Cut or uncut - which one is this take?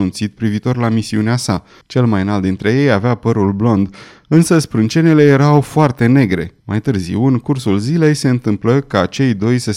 cut